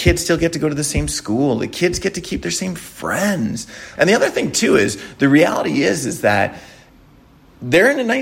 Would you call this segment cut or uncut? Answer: cut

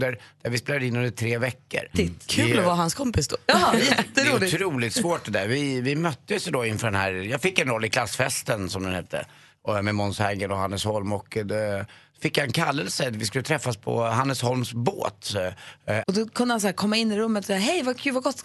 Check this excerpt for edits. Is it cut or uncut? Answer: cut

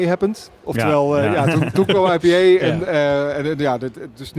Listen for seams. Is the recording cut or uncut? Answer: uncut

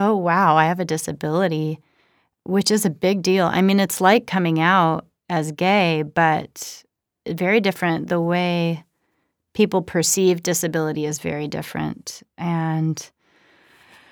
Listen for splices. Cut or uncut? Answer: uncut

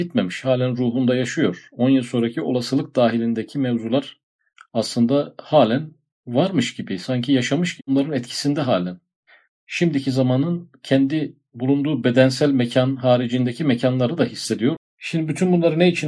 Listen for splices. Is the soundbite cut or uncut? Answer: cut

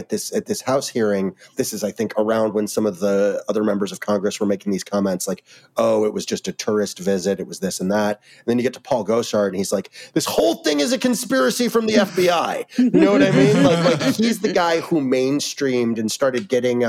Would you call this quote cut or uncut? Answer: uncut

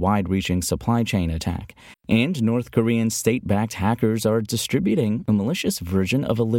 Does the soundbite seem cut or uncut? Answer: cut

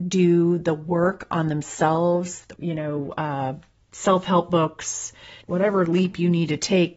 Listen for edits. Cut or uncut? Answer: cut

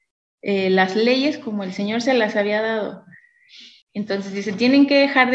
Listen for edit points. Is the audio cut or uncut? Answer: cut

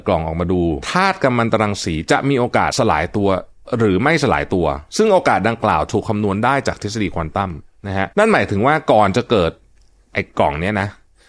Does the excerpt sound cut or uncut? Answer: cut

